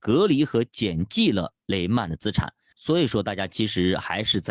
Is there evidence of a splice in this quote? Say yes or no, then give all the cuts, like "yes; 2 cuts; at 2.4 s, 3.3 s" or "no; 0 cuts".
yes; 1 cut; at 2.7 s